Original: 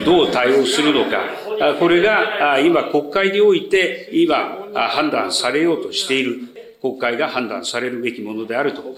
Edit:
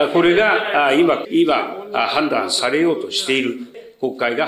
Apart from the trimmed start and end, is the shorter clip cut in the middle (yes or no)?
yes